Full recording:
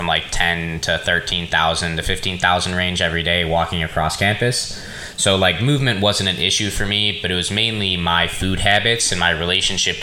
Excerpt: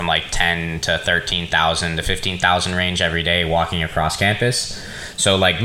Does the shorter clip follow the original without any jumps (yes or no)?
yes